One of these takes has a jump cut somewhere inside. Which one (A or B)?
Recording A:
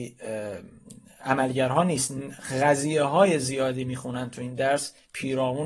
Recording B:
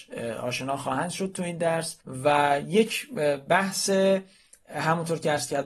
B